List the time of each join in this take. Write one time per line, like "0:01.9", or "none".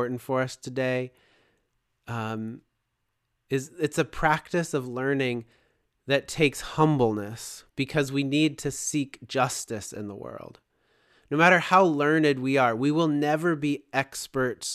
0:07.7